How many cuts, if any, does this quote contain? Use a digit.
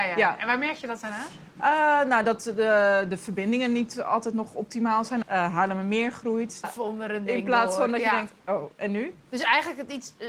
2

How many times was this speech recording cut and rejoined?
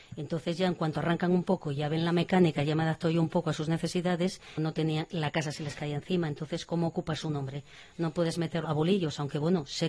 2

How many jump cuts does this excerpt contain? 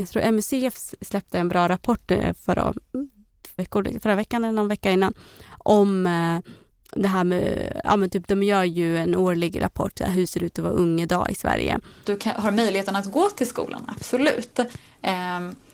2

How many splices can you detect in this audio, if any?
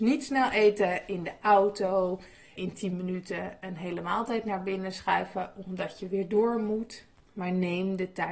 1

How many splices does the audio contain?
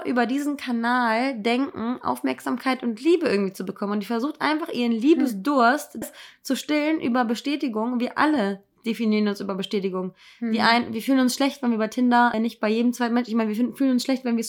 2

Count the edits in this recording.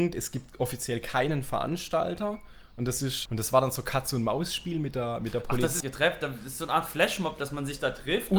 2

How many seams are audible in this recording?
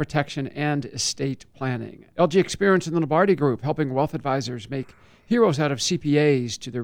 1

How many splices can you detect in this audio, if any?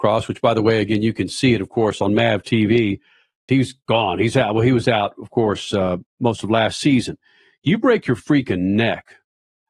1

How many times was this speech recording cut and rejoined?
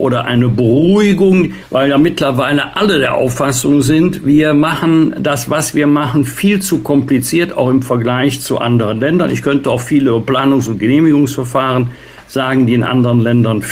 0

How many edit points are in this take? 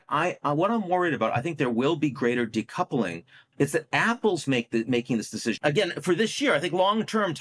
2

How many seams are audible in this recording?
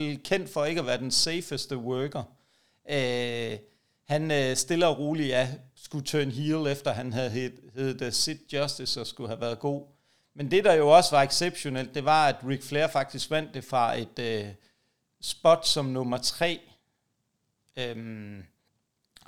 0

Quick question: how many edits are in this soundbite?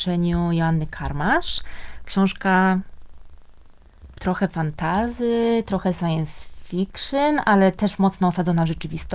0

